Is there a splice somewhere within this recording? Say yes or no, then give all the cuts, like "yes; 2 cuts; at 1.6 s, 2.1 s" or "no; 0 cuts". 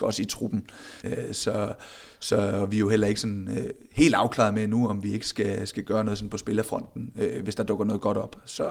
yes; 1 cut; at 1.0 s